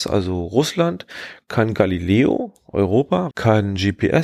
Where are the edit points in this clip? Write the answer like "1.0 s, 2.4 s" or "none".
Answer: 3.3 s

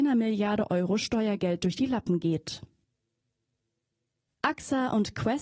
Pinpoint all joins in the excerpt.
none

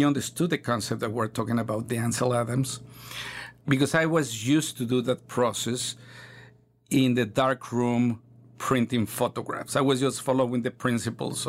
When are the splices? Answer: none

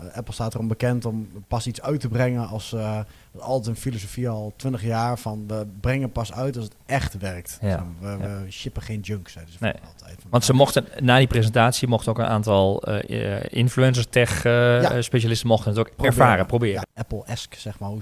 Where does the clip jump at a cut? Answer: 16.8 s

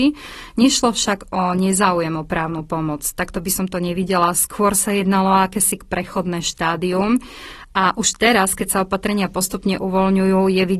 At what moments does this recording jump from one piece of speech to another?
none

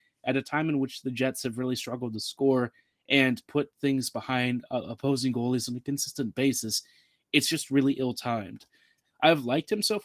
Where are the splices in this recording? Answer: 9.0 s

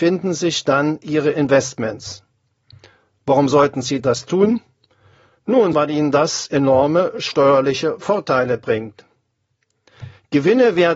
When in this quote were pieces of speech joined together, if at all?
5.7 s

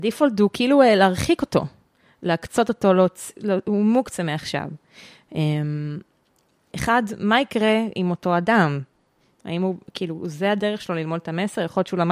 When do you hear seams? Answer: 6.7 s

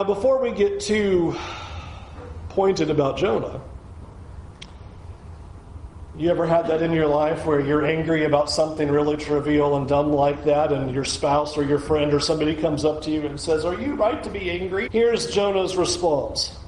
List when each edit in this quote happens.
14.9 s

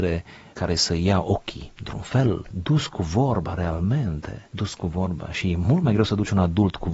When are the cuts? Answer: none

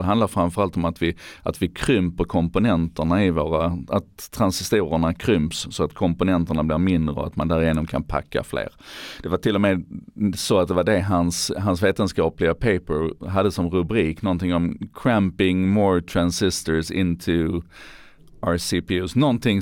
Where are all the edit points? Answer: none

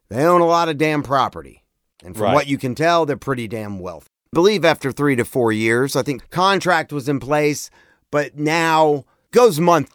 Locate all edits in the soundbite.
none

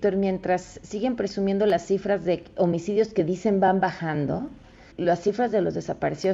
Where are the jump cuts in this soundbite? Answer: 4.9 s

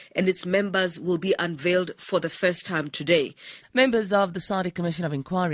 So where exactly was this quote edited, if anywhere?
3.6 s

